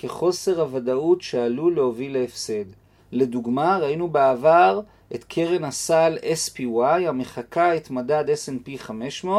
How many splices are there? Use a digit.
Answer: 1